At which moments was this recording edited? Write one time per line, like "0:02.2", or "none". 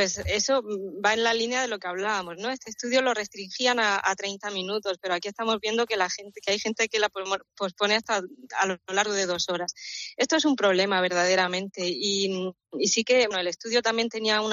0:13.3